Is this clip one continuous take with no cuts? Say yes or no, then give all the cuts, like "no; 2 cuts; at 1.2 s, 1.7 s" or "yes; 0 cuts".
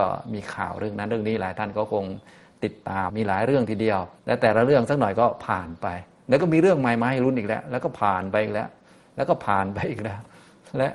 no; 2 cuts; at 3.1 s, 4.2 s